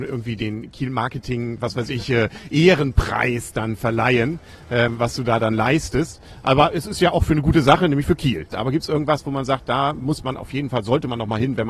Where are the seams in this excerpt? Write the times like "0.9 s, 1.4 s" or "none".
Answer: 8.5 s